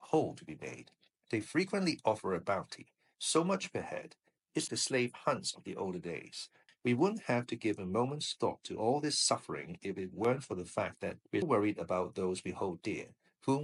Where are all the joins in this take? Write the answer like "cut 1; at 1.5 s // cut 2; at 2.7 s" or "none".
cut 1; at 4.7 s // cut 2; at 6.7 s // cut 3; at 11.4 s

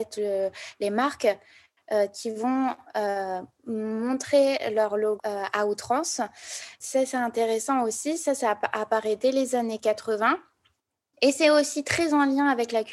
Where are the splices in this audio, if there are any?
cut 1; at 5.2 s

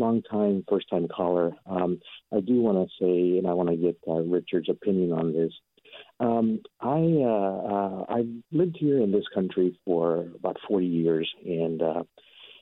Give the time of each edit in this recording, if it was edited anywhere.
none

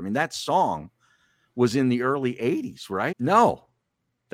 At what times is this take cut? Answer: cut 1; at 3.1 s

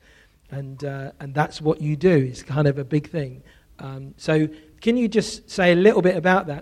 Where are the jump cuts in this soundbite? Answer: none

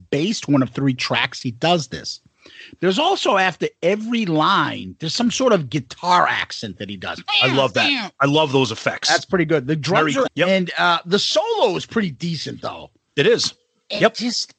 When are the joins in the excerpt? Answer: cut 1; at 10.3 s

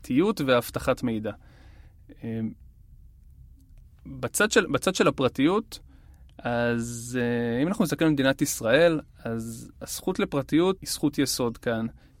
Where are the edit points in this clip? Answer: cut 1; at 10.8 s

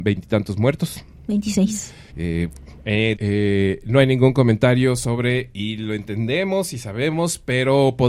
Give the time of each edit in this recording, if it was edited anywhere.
cut 1; at 2.1 s // cut 2; at 3.2 s

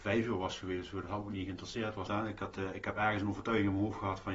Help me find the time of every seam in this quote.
cut 1; at 2.1 s

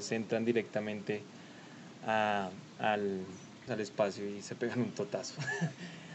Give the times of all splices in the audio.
cut 1; at 3.7 s

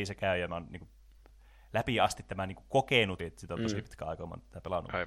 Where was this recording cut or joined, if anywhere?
cut 1; at 3.2 s

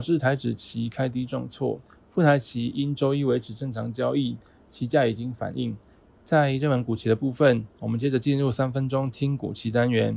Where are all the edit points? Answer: cut 1; at 6.1 s

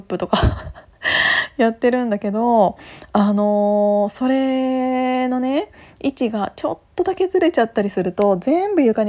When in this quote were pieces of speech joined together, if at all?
none

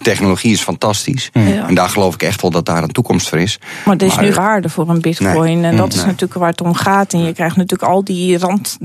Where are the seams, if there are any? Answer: cut 1; at 4.3 s

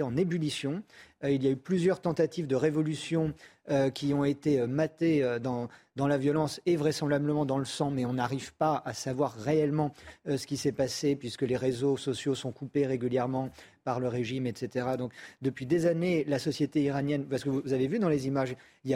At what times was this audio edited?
none

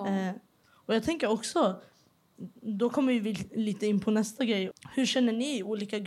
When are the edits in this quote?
cut 1; at 4.7 s

